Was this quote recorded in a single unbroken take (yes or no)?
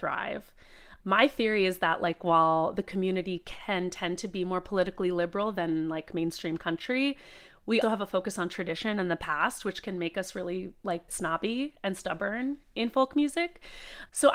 no